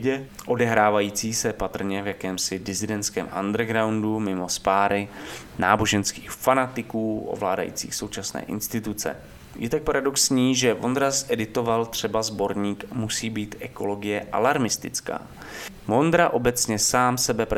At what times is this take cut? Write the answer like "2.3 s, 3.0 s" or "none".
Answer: 15.8 s